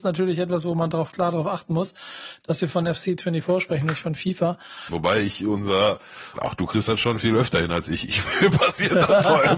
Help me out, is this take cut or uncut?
cut